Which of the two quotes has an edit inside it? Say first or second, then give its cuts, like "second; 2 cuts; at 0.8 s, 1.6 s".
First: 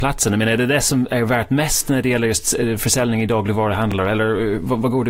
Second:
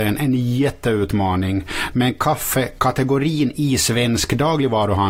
second; 1 cut; at 1.9 s